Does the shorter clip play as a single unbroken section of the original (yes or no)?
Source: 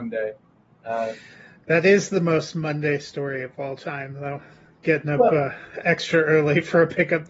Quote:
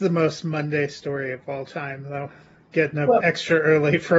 no